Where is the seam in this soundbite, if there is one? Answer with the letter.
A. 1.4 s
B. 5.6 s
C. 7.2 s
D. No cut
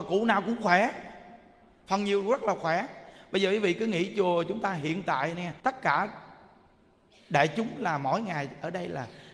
B